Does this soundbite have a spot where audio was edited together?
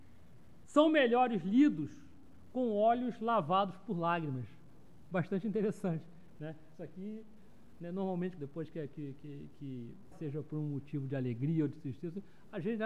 yes; 2 cuts; at 8.4 s, 10.1 s

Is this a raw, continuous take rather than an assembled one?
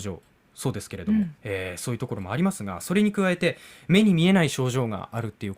no; 1 cut; at 1.4 s

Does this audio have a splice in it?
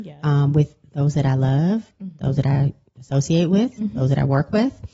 no; 0 cuts

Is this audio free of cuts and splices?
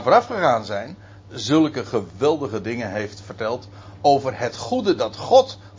no; 1 cut; at 1.3 s

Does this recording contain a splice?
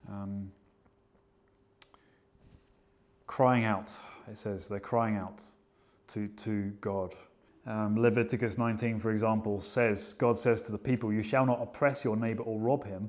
yes; 1 cut; at 7.5 s

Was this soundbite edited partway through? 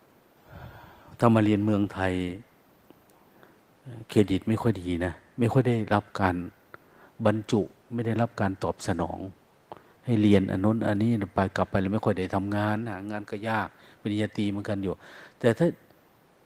no; 0 cuts

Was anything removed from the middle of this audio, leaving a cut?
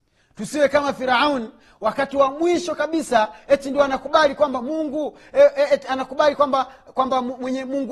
no; 0 cuts

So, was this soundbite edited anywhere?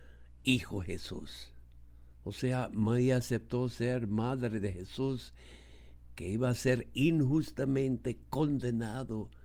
yes; 1 cut; at 2.1 s

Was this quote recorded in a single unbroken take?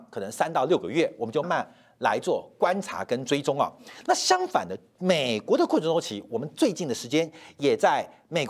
no; 1 cut; at 1.4 s

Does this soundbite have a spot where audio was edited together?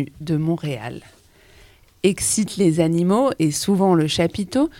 no; 0 cuts

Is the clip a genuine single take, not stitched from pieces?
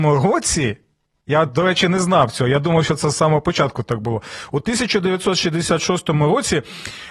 yes; 0 cuts

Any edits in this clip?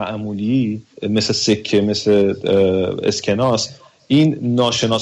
yes; 1 cut; at 0.9 s

